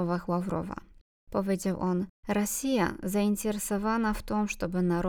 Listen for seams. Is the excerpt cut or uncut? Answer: uncut